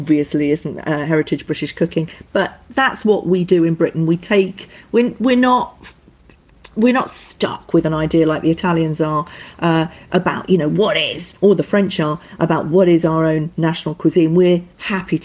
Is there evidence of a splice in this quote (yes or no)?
no